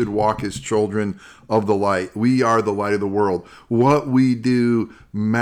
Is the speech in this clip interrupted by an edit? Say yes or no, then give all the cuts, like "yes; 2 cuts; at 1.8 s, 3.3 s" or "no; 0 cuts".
no; 0 cuts